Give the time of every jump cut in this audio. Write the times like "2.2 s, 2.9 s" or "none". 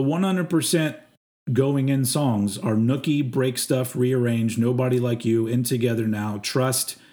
none